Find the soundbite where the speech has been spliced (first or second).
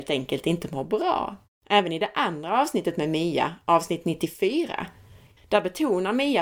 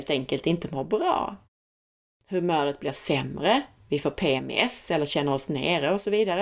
first